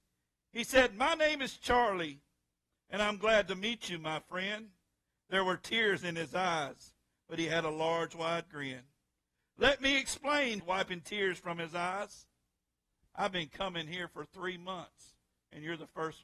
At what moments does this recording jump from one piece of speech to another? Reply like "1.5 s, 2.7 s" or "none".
10.6 s